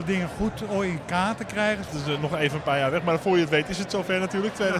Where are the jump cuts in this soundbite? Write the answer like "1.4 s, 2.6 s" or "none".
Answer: 1.9 s